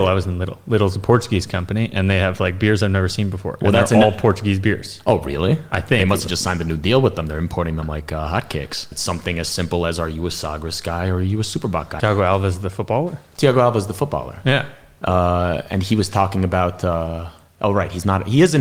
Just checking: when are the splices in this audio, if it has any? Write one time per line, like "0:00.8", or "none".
0:08.9
0:12.0